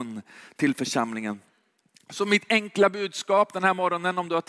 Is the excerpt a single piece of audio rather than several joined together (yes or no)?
yes